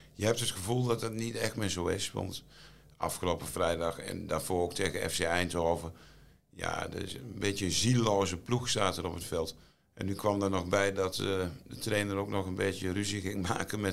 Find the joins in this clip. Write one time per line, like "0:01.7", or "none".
none